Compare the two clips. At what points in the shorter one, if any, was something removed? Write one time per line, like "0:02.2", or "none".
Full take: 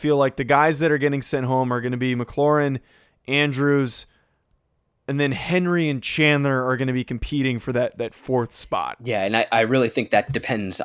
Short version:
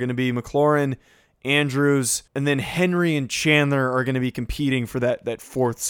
0:02.3